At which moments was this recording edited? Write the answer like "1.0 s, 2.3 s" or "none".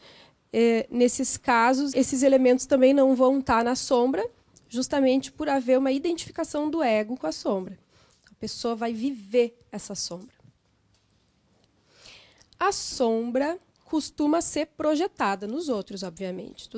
1.9 s